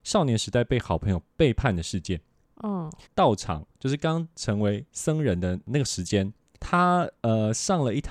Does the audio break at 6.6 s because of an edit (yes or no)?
yes